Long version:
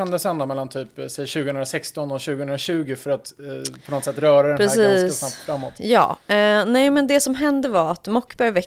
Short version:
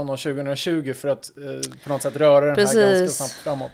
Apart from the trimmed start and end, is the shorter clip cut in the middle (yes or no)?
no